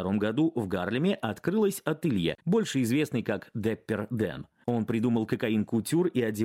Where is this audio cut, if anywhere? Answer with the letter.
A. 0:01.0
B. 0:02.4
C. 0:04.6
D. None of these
B